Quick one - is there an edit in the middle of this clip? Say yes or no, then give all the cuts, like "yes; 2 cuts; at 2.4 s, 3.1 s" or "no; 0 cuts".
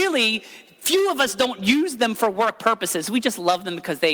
no; 0 cuts